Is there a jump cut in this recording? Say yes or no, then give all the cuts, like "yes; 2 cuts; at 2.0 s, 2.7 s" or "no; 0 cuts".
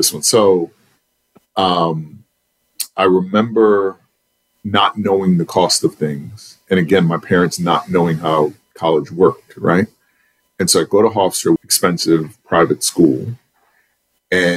yes; 1 cut; at 11.6 s